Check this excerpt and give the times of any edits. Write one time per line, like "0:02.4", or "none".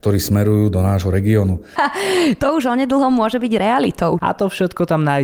0:01.8
0:04.2